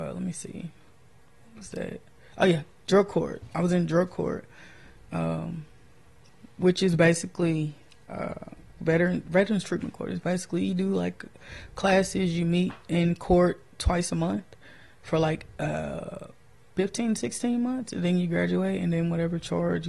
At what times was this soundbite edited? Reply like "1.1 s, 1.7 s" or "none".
none